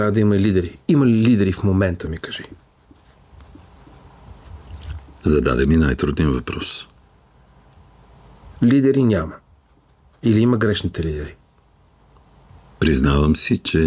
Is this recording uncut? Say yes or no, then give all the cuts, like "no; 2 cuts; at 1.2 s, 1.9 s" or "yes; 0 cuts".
yes; 0 cuts